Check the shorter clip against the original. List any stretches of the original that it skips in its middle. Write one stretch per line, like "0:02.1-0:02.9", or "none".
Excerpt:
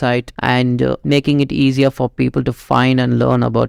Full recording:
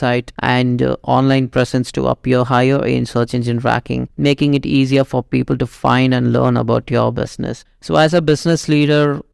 0:01.0-0:04.1